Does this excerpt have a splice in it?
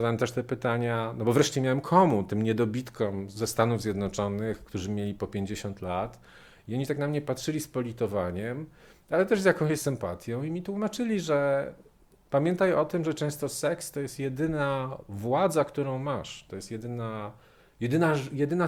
no; 0 cuts

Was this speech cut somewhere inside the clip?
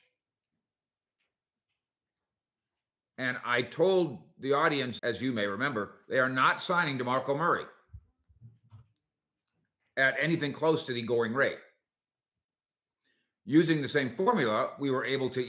yes; 1 cut; at 5.0 s

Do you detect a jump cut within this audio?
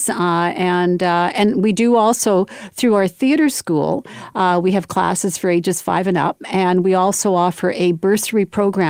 no; 0 cuts

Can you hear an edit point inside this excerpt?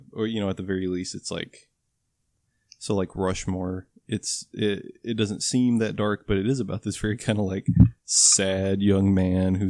no; 0 cuts

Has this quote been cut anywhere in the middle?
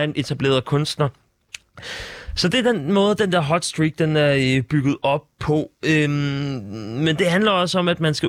no; 0 cuts

